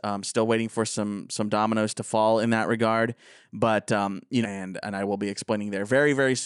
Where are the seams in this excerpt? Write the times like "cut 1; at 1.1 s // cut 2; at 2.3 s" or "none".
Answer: cut 1; at 4.4 s